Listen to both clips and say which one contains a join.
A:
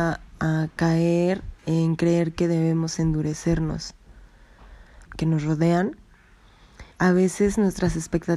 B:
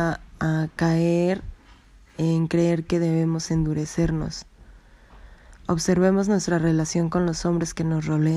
A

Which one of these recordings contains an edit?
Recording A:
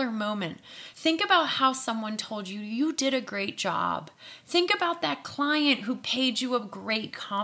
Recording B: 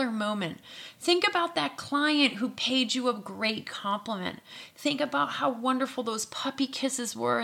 B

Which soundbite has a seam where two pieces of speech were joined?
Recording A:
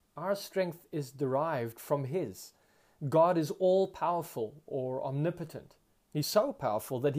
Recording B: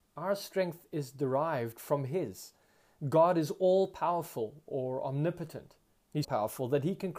B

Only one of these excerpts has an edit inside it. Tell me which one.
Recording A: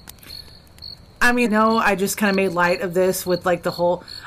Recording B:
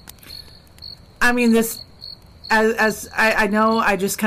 A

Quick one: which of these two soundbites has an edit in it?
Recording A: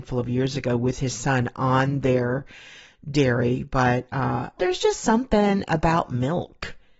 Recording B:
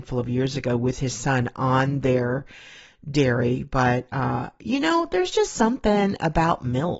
A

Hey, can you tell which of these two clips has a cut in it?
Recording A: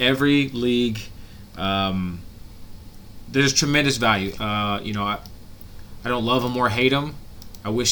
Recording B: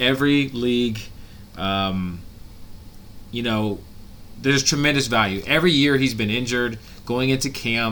A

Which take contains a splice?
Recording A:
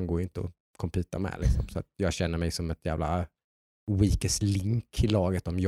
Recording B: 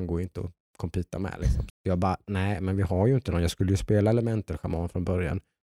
B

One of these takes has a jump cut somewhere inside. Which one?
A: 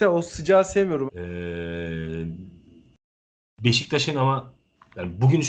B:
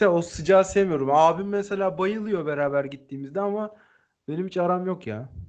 A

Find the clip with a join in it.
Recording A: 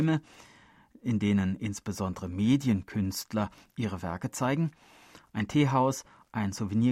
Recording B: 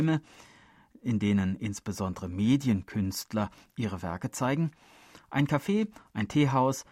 A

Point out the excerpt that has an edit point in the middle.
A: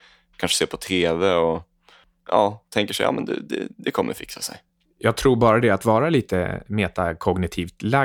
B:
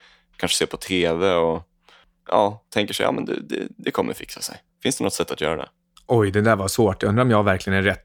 B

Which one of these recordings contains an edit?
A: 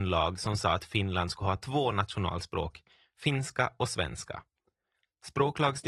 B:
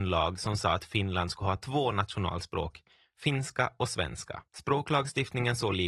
B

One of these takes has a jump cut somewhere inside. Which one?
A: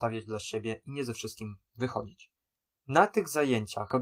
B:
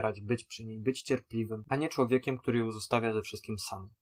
B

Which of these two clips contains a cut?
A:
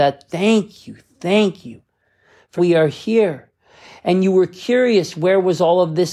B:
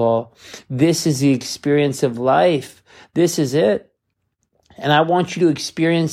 A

